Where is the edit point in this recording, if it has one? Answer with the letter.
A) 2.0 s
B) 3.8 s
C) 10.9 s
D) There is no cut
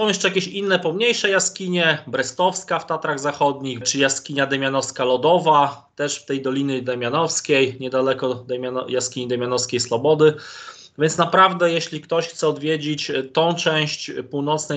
B